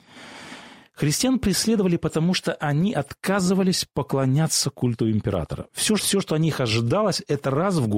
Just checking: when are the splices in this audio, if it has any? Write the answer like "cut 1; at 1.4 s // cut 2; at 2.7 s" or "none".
cut 1; at 6.0 s